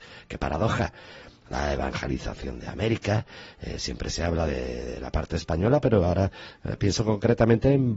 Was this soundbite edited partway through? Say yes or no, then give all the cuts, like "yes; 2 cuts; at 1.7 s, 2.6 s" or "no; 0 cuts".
no; 0 cuts